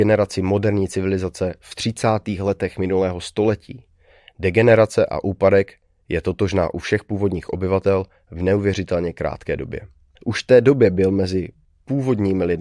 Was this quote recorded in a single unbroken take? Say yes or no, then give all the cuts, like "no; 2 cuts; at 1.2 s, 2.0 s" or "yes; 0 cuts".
no; 2 cuts; at 4.2 s, 10.1 s